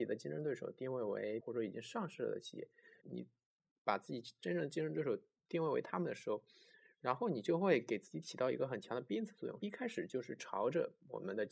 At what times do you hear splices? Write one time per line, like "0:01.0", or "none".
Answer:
0:01.4
0:03.0
0:09.6